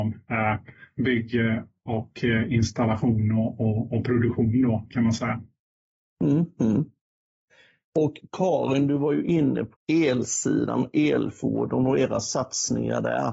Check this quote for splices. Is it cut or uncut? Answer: cut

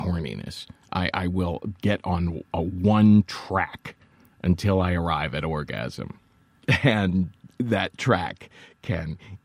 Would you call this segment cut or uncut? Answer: uncut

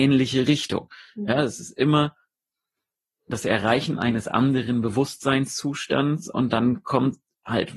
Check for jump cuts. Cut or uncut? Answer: uncut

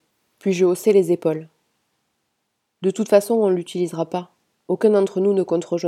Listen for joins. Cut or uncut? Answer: uncut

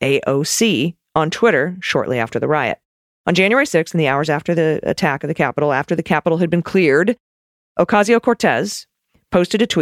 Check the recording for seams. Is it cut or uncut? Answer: uncut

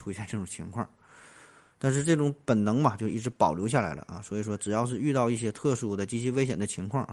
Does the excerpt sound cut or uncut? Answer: uncut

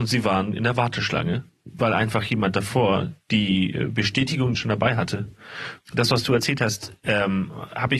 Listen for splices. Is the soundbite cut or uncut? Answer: cut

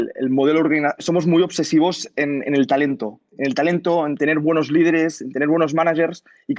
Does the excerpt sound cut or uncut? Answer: cut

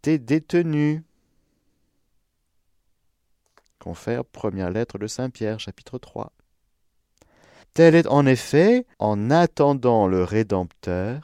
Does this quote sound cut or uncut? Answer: cut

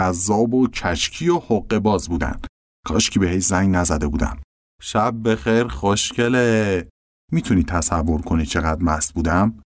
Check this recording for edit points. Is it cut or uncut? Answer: cut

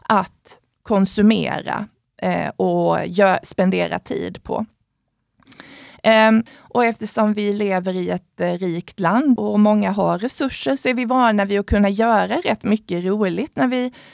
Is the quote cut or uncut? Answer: cut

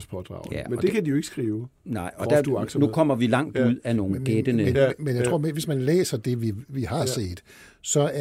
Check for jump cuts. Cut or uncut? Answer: uncut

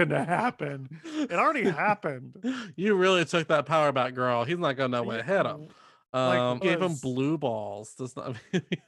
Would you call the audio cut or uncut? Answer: cut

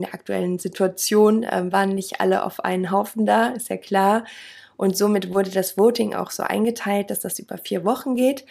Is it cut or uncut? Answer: uncut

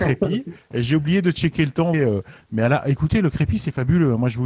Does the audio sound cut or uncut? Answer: cut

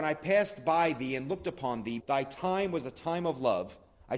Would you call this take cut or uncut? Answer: cut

